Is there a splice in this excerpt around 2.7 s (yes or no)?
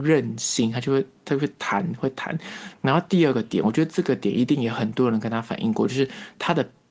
yes